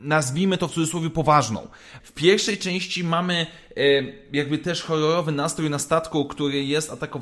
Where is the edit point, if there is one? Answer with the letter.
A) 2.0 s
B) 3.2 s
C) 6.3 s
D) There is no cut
A